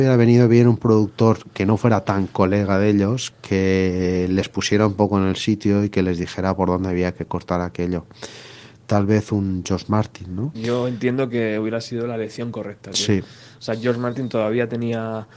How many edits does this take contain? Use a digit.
1